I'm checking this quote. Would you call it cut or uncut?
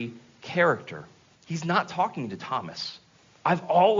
cut